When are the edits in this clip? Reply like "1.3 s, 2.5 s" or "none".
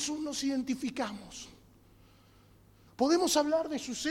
2.9 s